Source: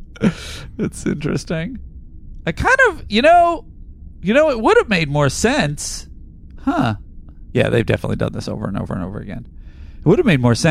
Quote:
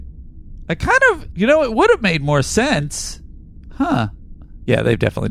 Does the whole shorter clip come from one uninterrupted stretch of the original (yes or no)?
no